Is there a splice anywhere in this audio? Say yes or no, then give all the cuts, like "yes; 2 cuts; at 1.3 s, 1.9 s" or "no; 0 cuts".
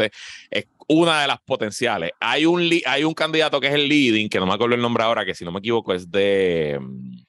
no; 0 cuts